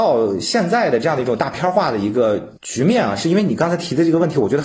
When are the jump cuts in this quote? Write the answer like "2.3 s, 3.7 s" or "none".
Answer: 2.6 s